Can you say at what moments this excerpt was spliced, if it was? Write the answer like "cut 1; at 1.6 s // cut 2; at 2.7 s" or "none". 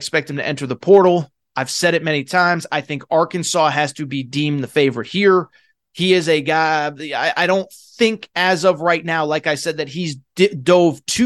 none